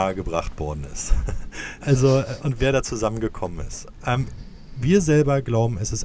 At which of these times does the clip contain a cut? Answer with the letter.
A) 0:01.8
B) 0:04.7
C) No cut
C